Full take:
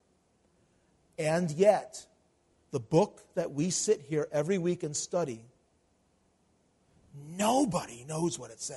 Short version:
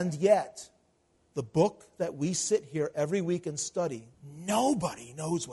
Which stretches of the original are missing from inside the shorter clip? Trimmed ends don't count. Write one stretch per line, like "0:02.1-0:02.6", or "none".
0:05.5-0:07.0